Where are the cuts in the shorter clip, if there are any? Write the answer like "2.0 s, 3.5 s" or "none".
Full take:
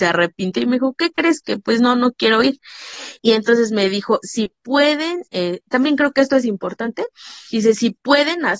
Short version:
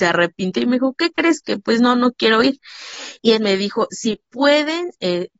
3.4 s